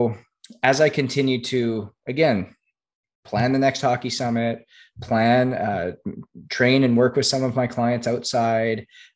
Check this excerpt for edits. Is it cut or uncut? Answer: uncut